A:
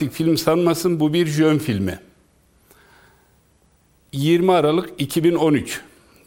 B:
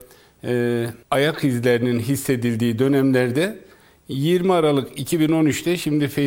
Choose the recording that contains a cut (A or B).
B